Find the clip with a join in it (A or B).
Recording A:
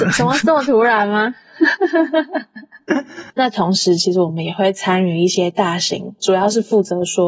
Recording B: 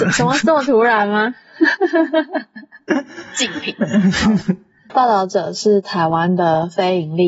A